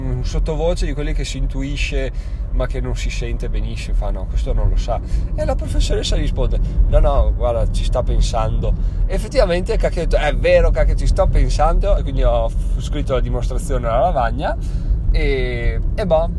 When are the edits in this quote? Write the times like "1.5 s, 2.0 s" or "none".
12.0 s